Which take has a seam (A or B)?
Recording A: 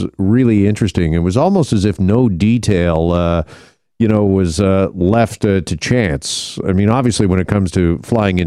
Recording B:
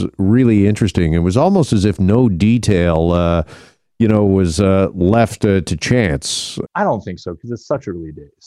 B